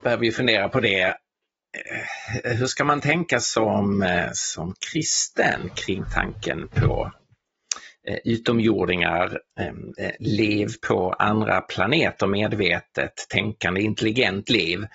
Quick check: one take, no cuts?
yes; 0 cuts

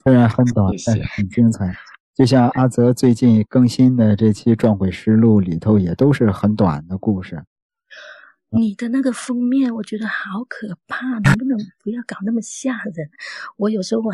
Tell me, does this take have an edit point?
no; 0 cuts

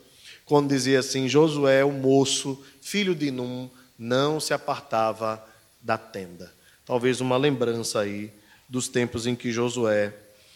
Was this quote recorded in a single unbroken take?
yes; 0 cuts

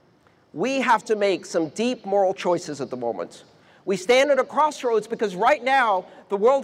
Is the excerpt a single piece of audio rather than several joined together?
yes; 0 cuts

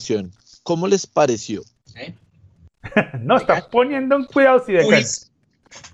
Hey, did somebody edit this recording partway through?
yes; 1 cut; at 1.8 s

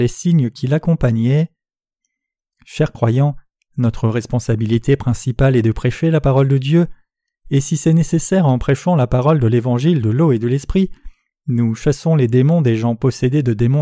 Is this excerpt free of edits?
yes; 0 cuts

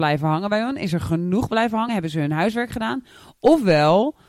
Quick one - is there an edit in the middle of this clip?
no; 0 cuts

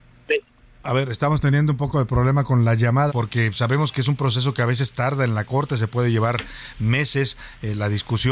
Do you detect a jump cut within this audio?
yes; 1 cut; at 3.1 s

